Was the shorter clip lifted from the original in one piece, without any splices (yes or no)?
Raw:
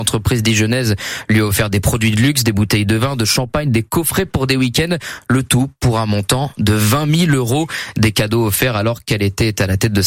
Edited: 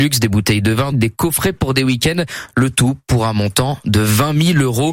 no